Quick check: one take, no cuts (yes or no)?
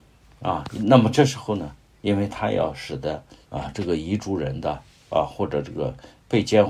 no